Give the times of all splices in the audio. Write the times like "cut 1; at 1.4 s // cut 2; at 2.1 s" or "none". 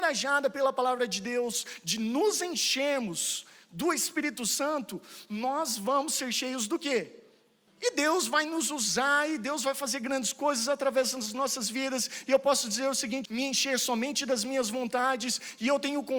cut 1; at 7.7 s // cut 2; at 13.3 s